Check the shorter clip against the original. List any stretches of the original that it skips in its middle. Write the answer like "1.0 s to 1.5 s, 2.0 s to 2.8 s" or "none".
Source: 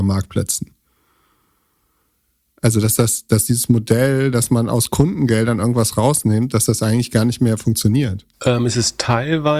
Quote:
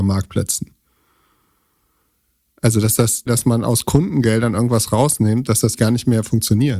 3.3 s to 4.3 s, 6.8 s to 7.1 s

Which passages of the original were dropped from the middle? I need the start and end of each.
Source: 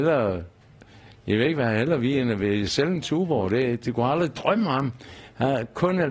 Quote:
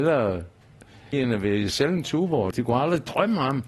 1.1 s to 2.1 s, 3.5 s to 3.8 s

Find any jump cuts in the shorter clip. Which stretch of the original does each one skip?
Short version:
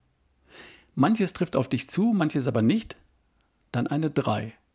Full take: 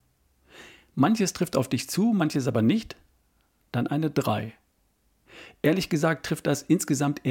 none

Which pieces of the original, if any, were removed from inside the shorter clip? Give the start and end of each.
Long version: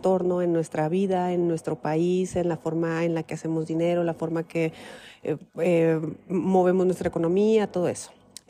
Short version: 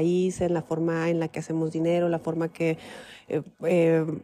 none

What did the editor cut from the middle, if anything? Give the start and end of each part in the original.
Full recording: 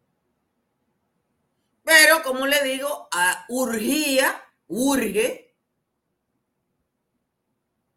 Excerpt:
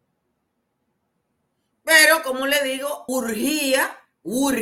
3.1 s to 3.5 s

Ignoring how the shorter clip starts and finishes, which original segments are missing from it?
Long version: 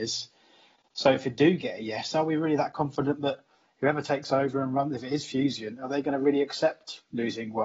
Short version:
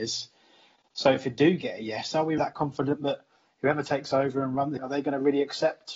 2.4 s to 2.6 s, 5.0 s to 5.8 s

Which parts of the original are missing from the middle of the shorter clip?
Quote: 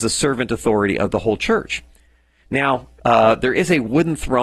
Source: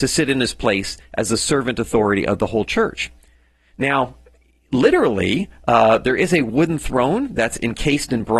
4.3 s to 5.6 s

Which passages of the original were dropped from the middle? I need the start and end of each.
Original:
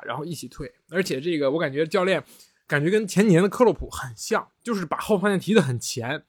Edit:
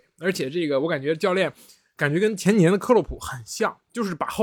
none

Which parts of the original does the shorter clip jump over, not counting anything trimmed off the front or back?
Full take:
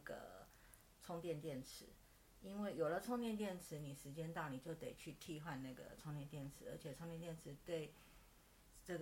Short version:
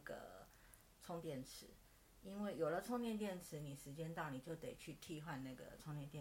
1.2 s to 1.4 s

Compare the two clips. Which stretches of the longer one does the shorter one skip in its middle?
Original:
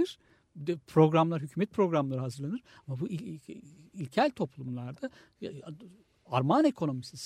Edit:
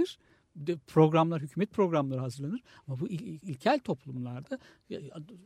3.4 s to 3.9 s

